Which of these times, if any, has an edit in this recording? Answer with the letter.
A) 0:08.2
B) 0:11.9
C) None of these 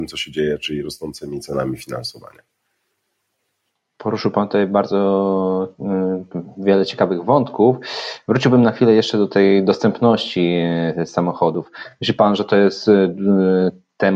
C